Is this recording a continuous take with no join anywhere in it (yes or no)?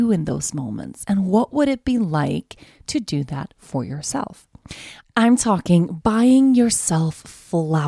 yes